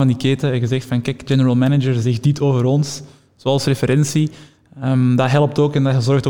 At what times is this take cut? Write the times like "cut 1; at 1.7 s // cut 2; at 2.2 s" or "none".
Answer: none